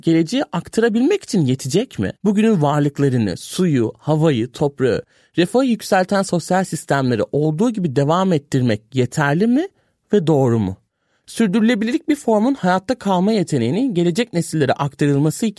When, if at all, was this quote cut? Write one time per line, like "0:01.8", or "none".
0:02.2